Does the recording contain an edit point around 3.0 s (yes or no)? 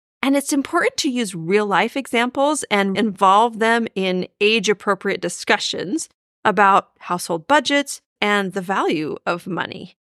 yes